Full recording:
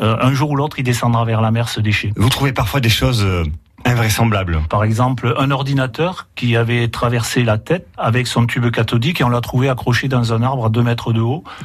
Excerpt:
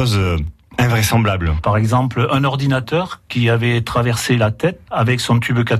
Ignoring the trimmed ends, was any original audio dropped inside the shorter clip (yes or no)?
no